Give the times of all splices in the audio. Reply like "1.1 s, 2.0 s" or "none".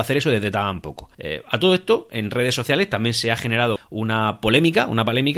1.1 s, 3.8 s